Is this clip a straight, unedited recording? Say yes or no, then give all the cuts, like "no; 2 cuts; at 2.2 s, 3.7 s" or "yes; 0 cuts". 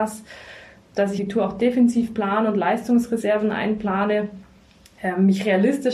no; 1 cut; at 1.2 s